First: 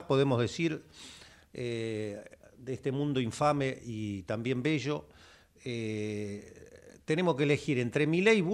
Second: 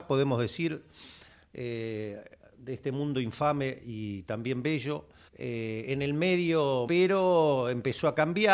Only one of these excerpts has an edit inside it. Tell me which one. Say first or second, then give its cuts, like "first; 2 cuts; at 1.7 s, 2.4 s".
second; 2 cuts; at 5.3 s, 6.9 s